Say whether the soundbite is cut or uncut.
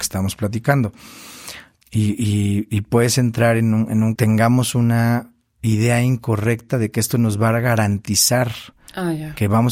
cut